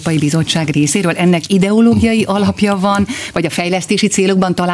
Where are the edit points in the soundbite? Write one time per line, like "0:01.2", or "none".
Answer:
none